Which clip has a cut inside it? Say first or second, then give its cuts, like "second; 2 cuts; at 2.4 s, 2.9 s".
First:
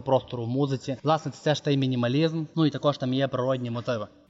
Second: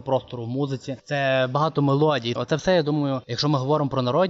second; 2 cuts; at 1.0 s, 2.4 s